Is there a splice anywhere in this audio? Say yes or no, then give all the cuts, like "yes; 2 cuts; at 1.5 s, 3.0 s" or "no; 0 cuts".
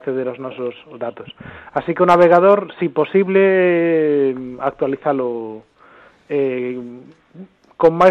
no; 0 cuts